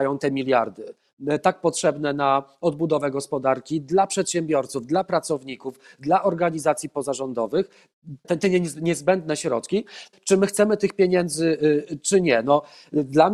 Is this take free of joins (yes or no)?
no